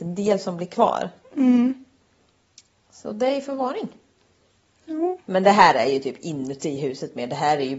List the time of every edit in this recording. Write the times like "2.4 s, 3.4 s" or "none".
none